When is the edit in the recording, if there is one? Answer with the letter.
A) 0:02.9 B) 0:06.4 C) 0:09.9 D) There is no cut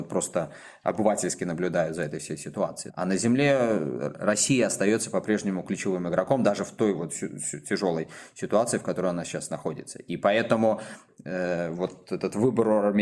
A